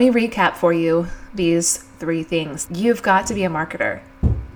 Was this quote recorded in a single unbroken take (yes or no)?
no